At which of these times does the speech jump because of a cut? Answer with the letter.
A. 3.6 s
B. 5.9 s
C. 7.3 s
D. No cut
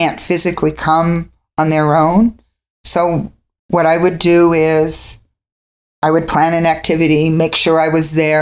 A